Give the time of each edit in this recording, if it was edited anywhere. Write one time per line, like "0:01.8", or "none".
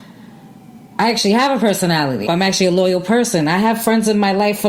0:02.3